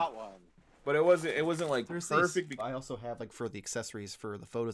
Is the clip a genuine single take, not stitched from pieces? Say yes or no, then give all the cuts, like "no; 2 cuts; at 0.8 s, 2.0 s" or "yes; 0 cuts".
no; 1 cut; at 2.6 s